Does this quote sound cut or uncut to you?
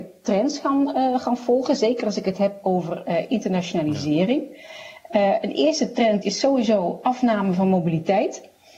cut